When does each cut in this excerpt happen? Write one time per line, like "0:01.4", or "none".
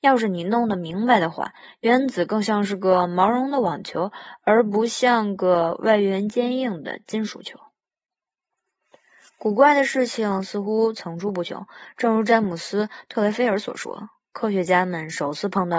none